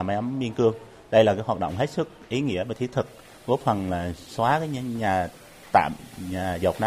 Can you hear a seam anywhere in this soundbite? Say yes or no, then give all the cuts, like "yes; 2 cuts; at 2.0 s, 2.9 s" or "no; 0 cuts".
no; 0 cuts